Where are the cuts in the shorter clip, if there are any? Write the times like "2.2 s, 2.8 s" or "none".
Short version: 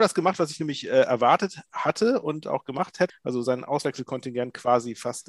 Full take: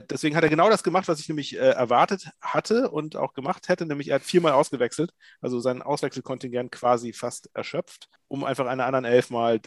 3.1 s